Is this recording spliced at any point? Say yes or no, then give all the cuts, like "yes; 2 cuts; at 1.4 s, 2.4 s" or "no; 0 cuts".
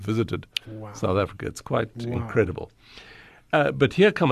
no; 0 cuts